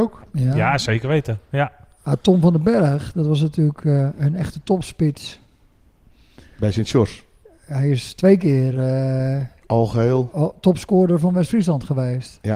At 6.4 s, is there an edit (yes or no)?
no